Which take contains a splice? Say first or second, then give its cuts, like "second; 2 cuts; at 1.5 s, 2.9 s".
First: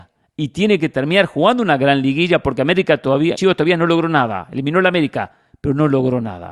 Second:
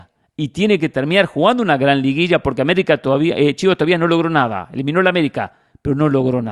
first; 1 cut; at 3.3 s